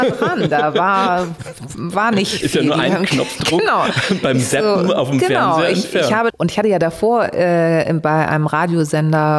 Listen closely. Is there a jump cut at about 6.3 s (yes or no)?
yes